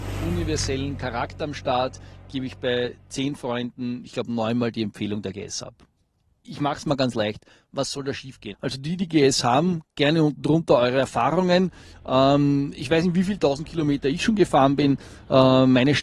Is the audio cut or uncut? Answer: cut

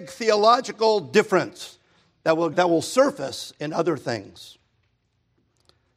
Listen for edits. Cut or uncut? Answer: cut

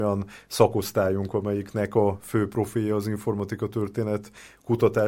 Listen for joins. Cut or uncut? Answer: uncut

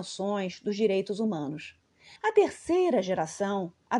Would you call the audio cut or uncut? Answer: cut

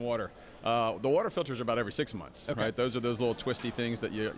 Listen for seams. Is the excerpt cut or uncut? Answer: uncut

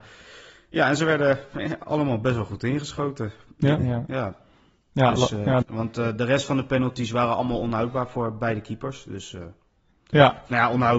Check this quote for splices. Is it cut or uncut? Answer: cut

